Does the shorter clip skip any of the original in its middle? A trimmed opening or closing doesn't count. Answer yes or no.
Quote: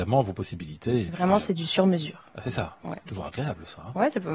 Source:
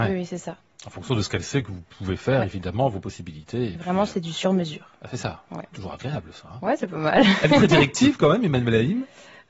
no